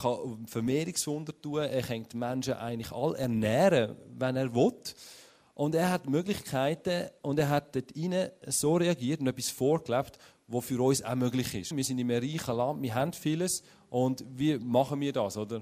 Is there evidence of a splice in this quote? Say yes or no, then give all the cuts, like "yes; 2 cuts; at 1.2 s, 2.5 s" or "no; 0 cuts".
yes; 1 cut; at 11.7 s